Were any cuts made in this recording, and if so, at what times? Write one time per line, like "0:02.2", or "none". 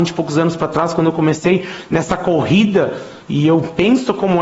0:03.2